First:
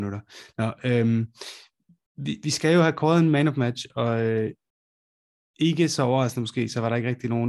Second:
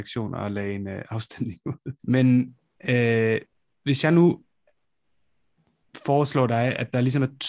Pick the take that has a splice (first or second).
second